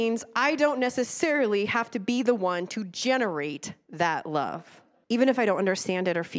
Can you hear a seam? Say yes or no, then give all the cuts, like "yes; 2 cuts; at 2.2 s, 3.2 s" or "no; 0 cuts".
yes; 1 cut; at 5.0 s